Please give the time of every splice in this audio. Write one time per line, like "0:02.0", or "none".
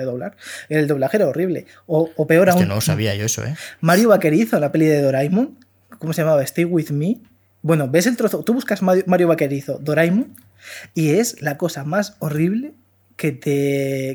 none